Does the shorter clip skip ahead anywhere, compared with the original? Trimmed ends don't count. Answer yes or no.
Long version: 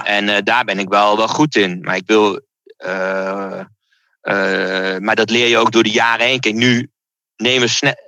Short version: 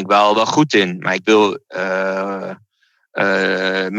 yes